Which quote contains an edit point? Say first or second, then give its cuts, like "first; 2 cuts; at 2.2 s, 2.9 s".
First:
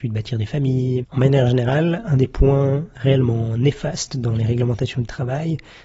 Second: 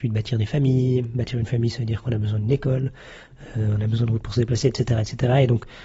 first; 1 cut; at 1.0 s